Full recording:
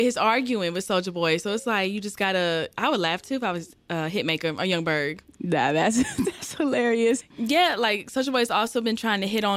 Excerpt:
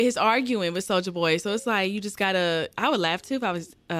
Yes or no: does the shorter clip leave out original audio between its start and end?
no